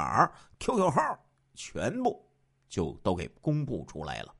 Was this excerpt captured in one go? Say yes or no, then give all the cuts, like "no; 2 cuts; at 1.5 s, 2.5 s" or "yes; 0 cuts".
yes; 0 cuts